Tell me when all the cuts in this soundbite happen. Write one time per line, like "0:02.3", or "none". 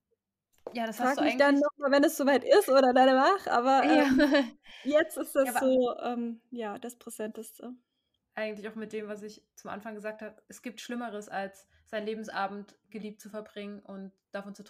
0:08.2